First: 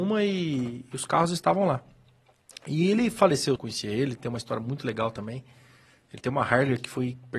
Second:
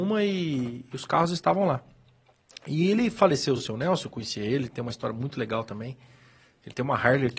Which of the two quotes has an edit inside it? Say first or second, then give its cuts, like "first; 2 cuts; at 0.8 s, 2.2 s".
first; 1 cut; at 3.6 s